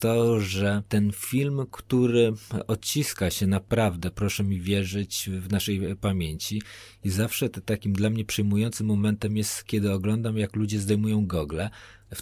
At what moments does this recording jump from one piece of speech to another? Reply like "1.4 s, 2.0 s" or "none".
none